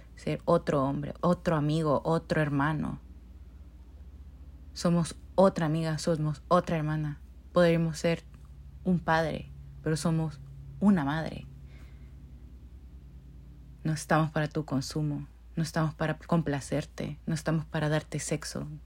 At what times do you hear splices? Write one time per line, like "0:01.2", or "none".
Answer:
0:01.1